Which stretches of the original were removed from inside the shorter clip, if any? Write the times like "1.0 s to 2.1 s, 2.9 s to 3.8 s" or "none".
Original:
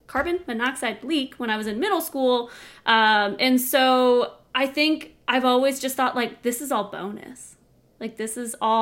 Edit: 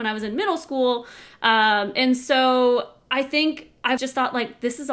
5.4 s to 5.8 s